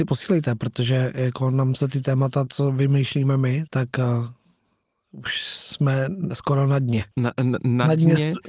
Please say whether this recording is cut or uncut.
cut